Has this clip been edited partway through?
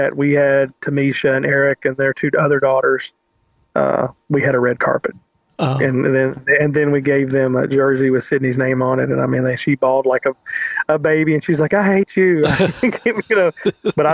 no; 0 cuts

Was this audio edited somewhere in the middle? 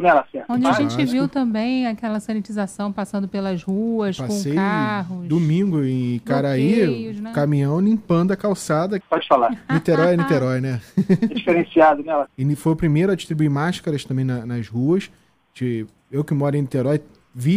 yes; 2 cuts; at 9.0 s, 12.3 s

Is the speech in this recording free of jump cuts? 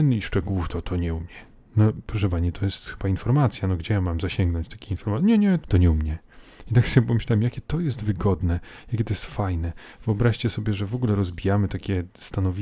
no; 1 cut; at 5.6 s

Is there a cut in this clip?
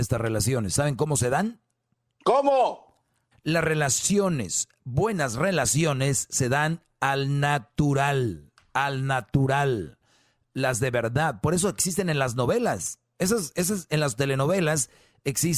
yes; 1 cut; at 3.3 s

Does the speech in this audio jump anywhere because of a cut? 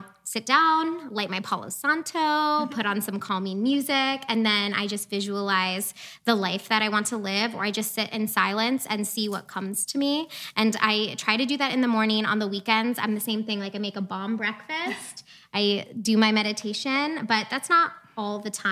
no; 0 cuts

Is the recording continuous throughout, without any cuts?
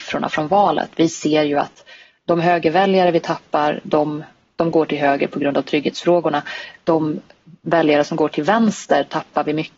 yes; 0 cuts

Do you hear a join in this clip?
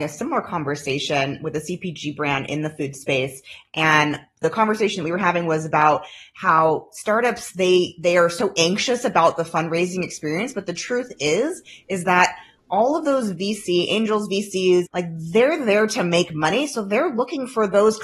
yes; 1 cut; at 14.9 s

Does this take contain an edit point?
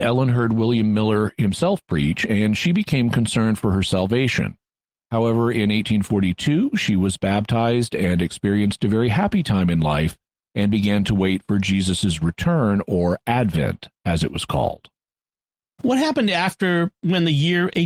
no; 0 cuts

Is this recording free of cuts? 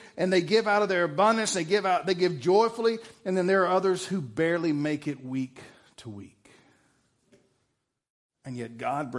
yes; 0 cuts

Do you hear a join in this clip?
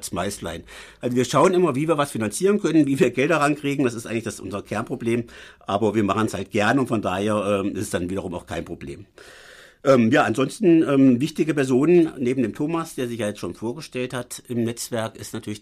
no; 0 cuts

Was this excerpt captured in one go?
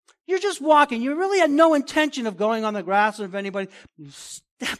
no; 1 cut; at 3.9 s

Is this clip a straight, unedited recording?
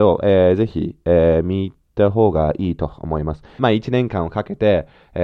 no; 1 cut; at 3.6 s

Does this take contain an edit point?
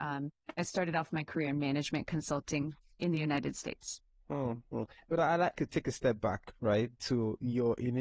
yes; 1 cut; at 5.5 s

